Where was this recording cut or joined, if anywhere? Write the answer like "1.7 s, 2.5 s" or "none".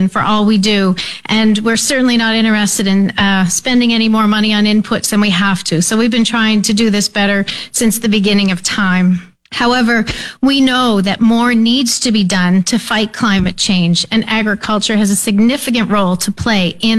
none